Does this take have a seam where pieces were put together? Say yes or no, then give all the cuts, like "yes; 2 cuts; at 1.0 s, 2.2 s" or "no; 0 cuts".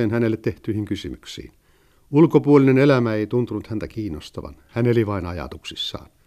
no; 0 cuts